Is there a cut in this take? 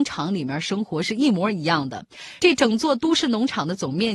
no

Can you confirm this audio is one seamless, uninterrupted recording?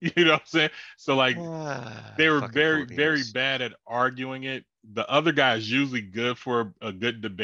yes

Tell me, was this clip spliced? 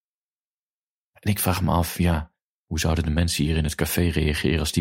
no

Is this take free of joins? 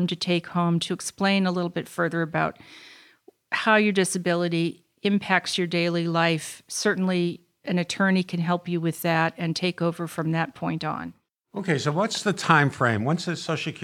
yes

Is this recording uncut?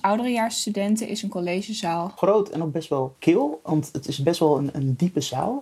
yes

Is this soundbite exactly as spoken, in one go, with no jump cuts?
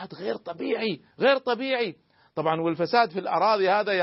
no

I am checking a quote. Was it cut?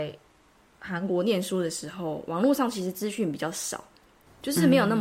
no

